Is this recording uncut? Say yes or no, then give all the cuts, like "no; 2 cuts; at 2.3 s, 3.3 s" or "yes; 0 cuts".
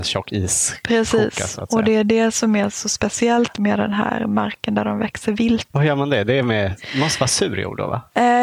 no; 1 cut; at 5.7 s